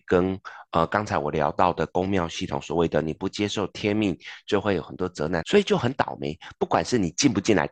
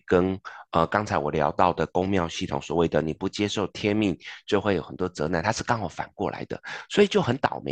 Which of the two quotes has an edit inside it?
first; 1 cut; at 5.4 s

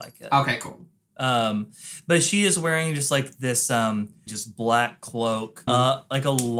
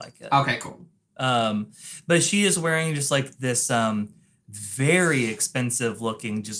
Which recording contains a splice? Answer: first; 2 cuts; at 4.3 s, 5.7 s

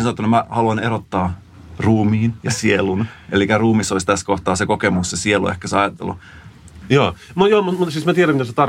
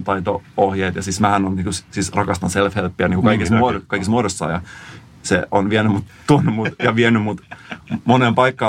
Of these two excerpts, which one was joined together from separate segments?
first; 1 cut; at 6.8 s

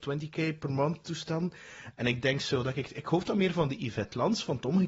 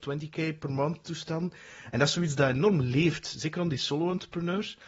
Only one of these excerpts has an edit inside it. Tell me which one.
first; 1 cut; at 1.9 s

